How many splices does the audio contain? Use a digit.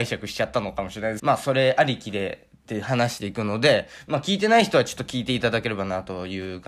1